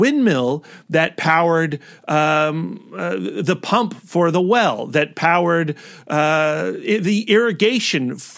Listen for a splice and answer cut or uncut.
uncut